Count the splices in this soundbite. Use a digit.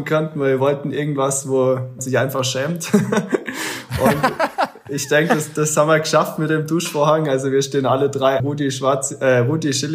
2